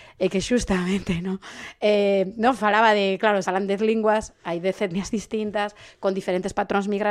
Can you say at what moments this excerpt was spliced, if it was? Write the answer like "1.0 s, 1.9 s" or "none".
3.4 s